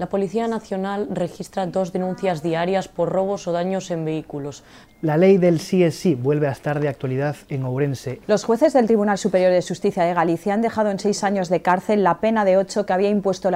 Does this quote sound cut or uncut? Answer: cut